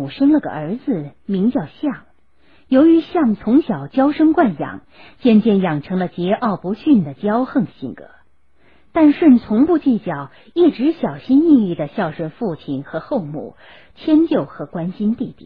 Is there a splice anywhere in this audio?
no; 0 cuts

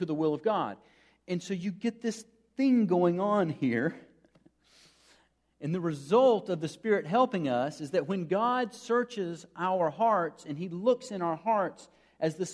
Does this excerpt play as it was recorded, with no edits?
yes; 0 cuts

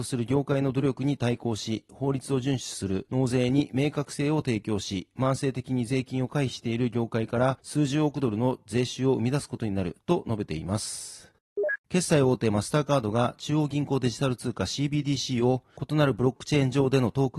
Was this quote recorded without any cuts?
no; 1 cut; at 11.8 s

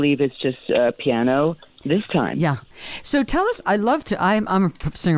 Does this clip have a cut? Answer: no; 0 cuts

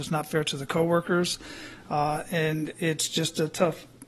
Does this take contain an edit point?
no; 0 cuts

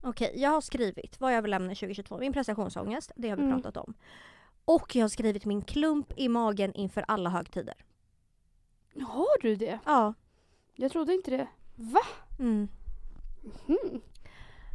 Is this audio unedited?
yes; 0 cuts

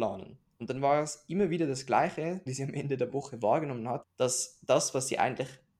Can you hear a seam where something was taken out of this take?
yes; 2 cuts; at 2.5 s, 4.0 s

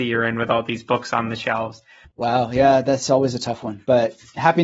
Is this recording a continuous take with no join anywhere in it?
no; 1 cut; at 2.0 s

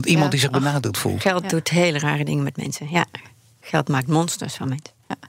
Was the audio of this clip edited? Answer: no; 0 cuts

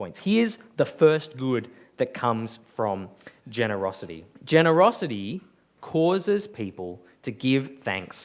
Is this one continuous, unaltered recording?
no; 1 cut; at 4.3 s

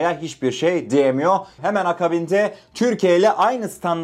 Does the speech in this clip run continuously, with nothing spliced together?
no; 1 cut; at 1.6 s

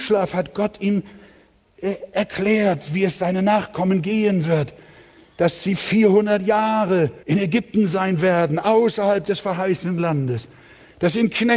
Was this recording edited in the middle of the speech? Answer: yes; 1 cut; at 7.2 s

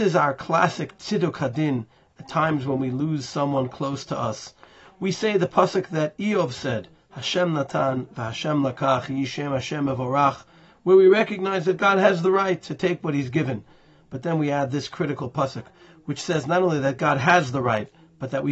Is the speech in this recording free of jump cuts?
yes; 0 cuts

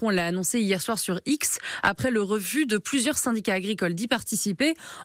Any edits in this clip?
no; 0 cuts

